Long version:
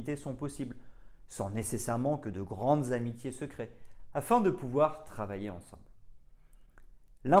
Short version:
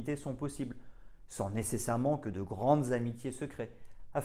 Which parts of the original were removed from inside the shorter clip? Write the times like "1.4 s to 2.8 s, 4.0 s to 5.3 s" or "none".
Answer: none